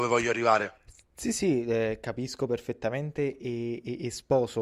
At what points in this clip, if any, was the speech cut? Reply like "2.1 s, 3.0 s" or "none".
none